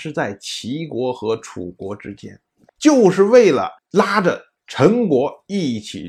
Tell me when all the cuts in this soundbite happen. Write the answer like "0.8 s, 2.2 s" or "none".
2.7 s, 3.8 s